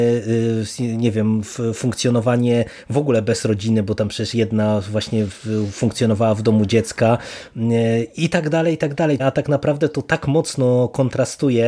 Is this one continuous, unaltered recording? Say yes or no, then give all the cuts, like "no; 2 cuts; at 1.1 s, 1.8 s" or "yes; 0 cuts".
no; 1 cut; at 9.2 s